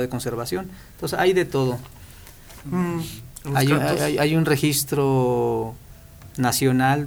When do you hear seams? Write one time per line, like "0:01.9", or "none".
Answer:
0:02.6